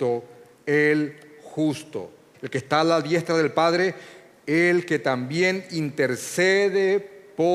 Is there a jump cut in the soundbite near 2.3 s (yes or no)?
yes